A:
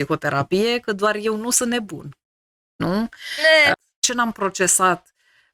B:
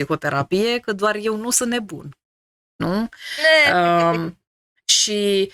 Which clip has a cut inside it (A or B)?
A